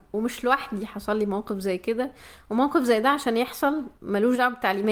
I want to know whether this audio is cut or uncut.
cut